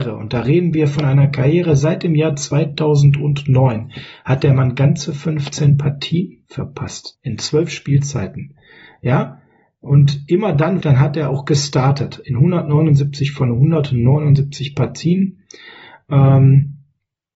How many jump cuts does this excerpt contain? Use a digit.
2